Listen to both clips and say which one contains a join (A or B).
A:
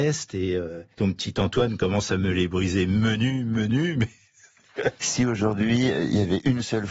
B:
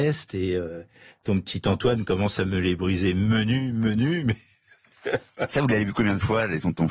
A